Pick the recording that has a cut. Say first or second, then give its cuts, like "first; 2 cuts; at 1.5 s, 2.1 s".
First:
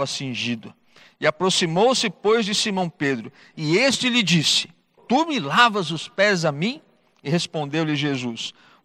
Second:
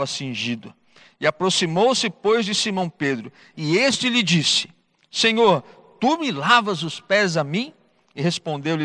first; 1 cut; at 5.0 s